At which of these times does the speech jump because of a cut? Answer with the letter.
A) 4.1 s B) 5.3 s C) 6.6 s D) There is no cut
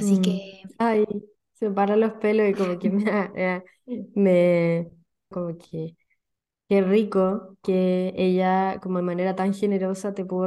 B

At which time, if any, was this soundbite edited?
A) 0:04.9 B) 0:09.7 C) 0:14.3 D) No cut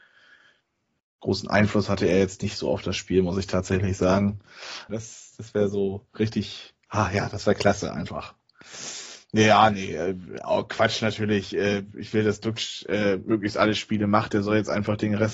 A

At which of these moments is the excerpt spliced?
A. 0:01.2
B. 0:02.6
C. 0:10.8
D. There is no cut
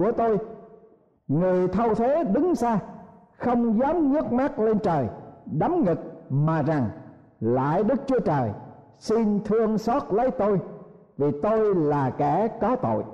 B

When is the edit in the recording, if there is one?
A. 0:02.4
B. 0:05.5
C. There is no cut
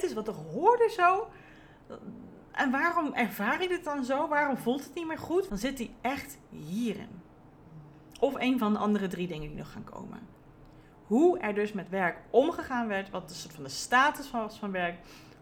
B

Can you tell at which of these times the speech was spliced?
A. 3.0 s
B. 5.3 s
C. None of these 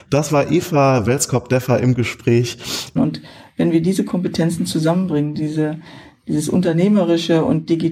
A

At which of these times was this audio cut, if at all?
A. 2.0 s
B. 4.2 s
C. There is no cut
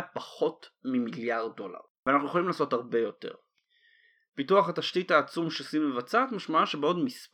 A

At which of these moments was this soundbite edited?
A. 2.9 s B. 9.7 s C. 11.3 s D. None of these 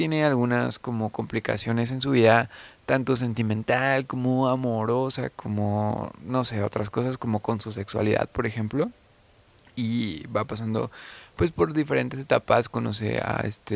D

